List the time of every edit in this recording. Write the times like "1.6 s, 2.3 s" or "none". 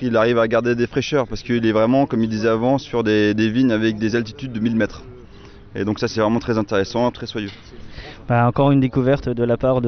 7.1 s